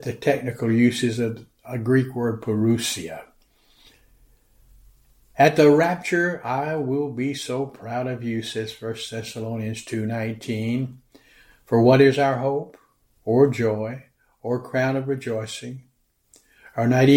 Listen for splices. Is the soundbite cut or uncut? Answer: uncut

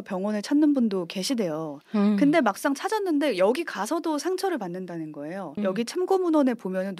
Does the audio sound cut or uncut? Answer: cut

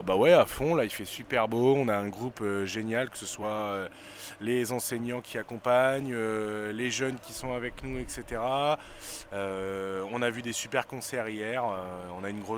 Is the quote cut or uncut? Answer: uncut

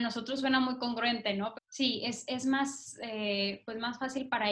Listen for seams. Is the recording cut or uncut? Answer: cut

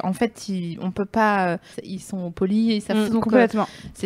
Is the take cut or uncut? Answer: cut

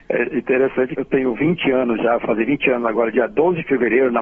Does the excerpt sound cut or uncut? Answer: cut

